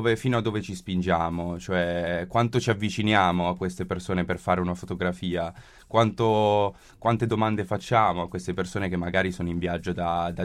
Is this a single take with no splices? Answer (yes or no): yes